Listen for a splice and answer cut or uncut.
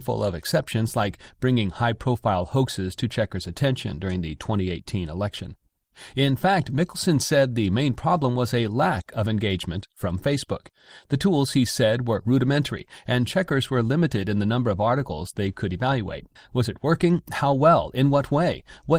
cut